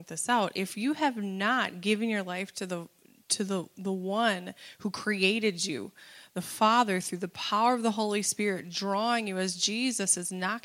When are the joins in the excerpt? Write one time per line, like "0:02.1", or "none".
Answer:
none